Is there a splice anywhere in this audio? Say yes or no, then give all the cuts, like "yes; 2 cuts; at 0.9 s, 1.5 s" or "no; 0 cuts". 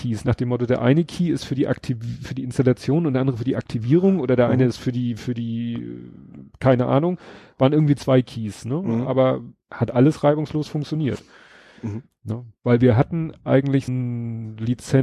yes; 1 cut; at 13.9 s